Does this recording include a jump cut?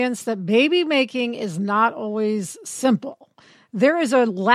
no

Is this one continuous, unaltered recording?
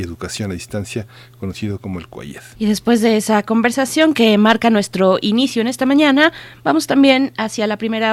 no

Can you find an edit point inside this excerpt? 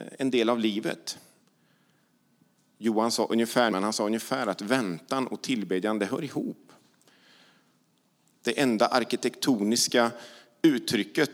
yes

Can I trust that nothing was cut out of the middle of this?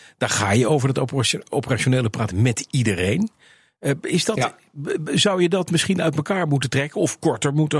yes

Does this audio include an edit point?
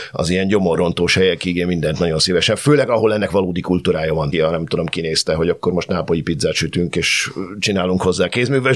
yes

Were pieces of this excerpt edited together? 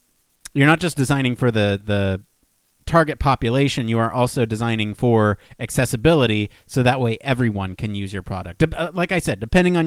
no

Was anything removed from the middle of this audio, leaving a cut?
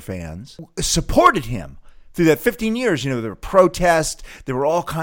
no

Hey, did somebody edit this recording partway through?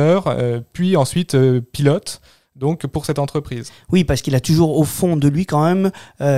no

